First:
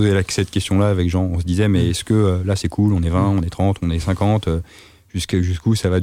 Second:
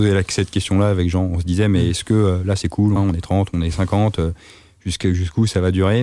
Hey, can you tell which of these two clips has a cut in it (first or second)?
second